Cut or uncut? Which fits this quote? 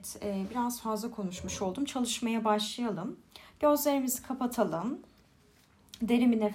uncut